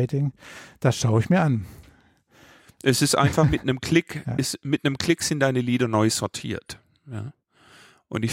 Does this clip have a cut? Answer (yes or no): no